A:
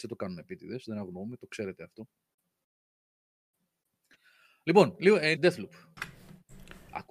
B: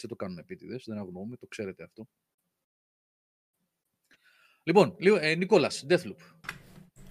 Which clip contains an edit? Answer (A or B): A